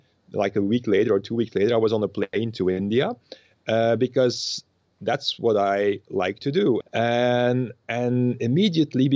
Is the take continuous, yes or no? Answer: no